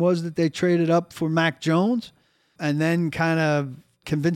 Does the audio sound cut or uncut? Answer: cut